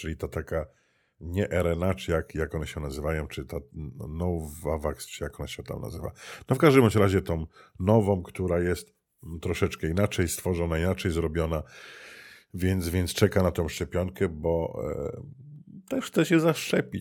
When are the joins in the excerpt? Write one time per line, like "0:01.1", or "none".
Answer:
none